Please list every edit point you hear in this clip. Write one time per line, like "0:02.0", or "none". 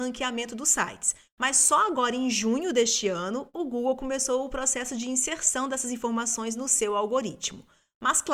0:01.3